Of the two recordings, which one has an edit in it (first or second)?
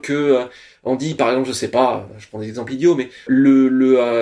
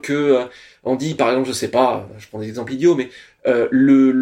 first